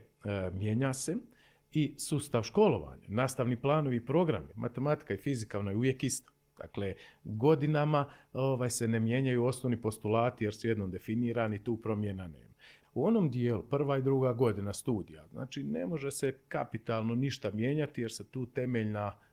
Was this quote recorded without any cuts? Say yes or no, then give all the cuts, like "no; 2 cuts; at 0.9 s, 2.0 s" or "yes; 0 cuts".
no; 2 cuts; at 4.5 s, 12.8 s